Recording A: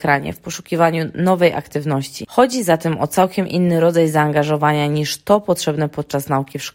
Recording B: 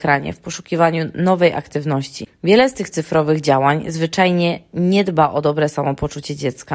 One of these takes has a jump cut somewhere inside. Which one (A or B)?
B